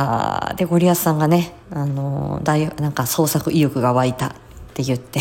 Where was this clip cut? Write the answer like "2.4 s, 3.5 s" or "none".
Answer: 1.6 s